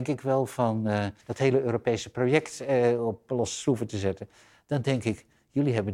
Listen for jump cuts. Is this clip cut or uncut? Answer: cut